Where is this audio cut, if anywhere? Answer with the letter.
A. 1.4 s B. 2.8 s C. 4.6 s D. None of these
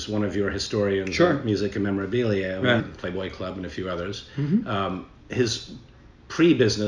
B